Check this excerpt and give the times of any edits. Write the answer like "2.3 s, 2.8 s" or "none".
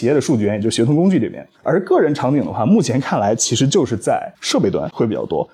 1.5 s